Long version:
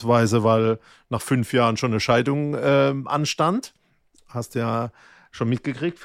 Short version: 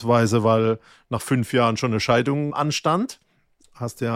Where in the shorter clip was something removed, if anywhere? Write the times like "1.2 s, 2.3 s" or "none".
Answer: 2.5 s

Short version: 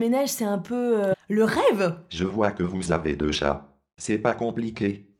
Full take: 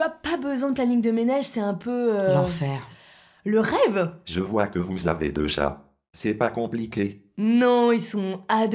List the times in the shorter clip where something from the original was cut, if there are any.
1.1 s

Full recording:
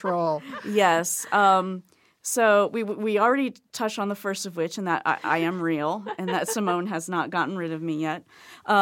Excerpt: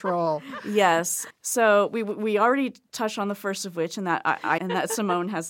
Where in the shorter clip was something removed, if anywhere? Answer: 1.3 s, 4.6 s

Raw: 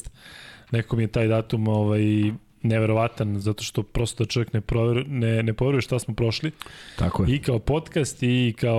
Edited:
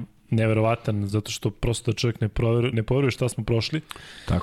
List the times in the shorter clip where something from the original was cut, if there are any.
2.7 s

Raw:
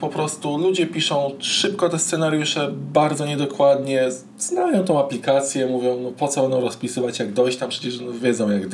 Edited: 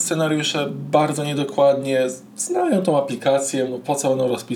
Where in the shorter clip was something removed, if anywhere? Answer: 3.7 s

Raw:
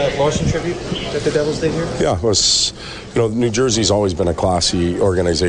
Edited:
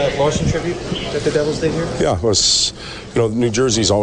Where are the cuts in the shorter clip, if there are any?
none

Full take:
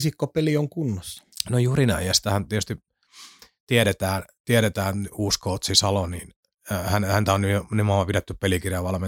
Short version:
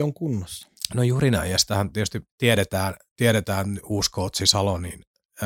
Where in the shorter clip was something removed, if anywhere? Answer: 2.3 s

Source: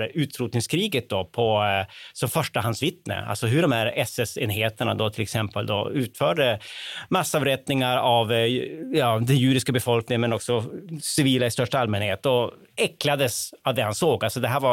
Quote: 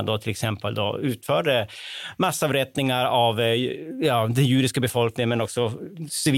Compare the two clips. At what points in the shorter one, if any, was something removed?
none

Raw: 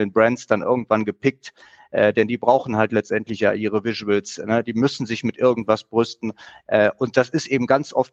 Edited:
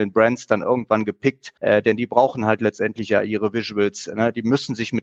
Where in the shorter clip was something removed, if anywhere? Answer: 1.6 s

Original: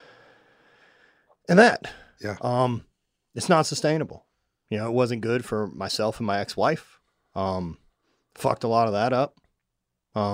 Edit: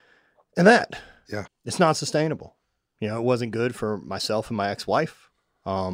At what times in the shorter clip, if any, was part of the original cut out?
1.5 s

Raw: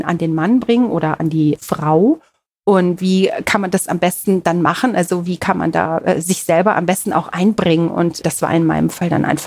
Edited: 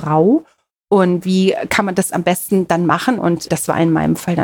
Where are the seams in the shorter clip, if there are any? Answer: 3.2 s

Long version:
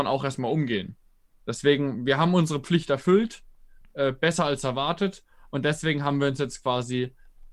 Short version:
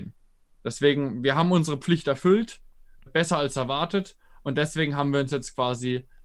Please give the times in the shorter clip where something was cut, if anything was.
3.1 s

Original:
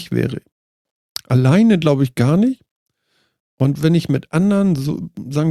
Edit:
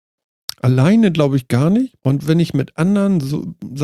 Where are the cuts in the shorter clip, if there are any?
2.0 s

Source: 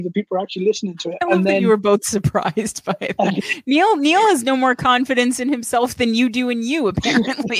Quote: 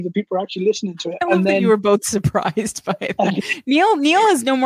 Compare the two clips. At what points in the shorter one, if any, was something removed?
none

